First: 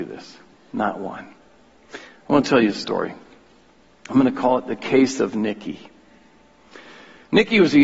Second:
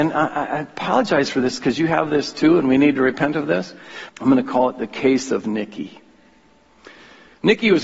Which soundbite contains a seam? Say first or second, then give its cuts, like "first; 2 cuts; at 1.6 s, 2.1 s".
second; 1 cut; at 4.1 s